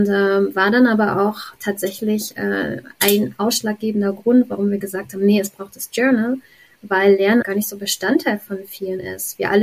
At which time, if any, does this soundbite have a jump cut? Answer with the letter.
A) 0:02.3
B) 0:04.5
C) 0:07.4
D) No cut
C